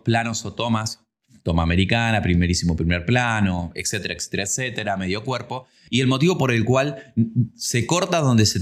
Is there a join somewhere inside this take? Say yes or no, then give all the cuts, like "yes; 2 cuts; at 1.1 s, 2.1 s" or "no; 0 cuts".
no; 0 cuts